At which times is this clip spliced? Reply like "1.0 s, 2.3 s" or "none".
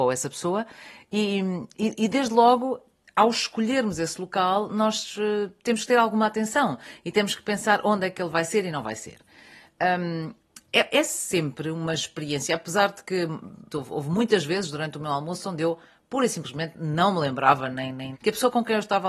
13.7 s, 18.1 s